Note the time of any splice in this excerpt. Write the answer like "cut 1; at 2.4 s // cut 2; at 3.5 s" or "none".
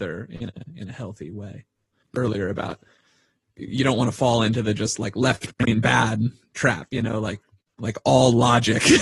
cut 1; at 2.0 s